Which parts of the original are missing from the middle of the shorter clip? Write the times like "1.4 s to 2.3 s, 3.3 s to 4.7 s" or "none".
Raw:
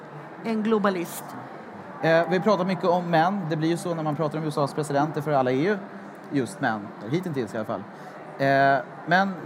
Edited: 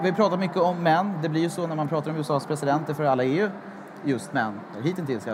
none